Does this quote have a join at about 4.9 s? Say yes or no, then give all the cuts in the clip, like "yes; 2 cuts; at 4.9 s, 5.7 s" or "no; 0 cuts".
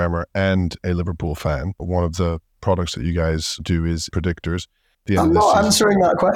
yes; 2 cuts; at 1.8 s, 4.9 s